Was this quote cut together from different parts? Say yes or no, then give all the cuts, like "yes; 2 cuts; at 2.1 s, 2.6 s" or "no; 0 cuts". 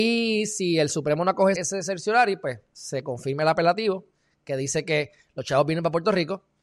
yes; 1 cut; at 1.5 s